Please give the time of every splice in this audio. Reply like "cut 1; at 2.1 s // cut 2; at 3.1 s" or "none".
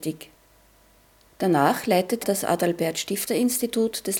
cut 1; at 2.2 s